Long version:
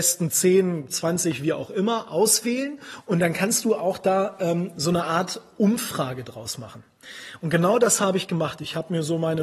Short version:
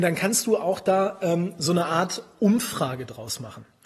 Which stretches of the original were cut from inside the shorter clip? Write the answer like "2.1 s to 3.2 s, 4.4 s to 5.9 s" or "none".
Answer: none